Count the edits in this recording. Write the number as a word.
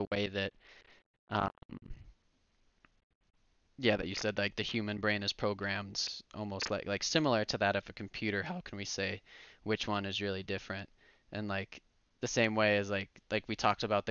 zero